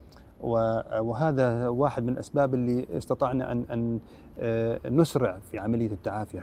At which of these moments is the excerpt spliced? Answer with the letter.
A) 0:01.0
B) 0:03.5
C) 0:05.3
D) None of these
D